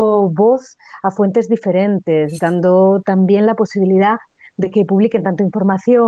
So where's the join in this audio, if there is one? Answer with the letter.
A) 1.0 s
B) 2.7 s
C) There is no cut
C